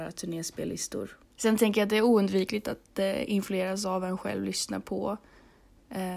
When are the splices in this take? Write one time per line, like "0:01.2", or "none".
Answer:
0:01.3